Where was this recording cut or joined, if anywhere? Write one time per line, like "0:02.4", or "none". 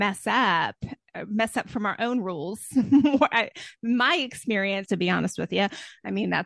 0:04.9